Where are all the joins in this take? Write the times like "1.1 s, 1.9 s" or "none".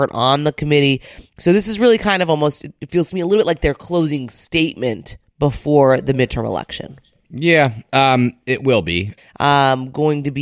9.2 s